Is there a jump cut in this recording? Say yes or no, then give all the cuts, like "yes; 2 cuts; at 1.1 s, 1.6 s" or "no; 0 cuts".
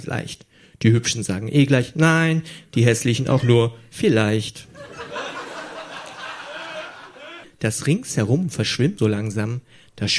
yes; 2 cuts; at 7.4 s, 9.0 s